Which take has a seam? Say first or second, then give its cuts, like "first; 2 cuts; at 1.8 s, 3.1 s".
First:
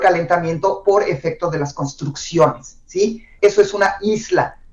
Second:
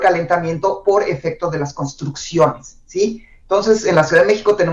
first; 1 cut; at 3.4 s